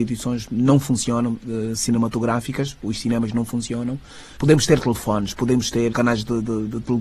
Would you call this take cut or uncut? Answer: cut